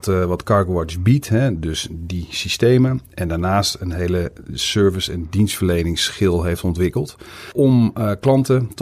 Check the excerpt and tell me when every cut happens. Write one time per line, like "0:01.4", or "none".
none